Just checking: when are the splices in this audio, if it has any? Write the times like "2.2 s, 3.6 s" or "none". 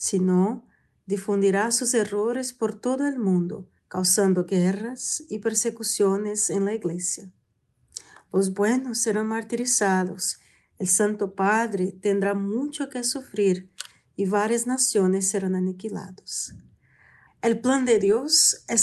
3.8 s, 17.3 s